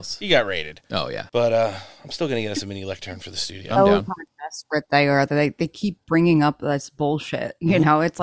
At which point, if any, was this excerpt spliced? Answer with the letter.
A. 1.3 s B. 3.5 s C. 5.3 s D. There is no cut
A